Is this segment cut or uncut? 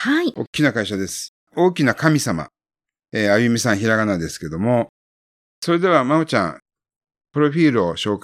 cut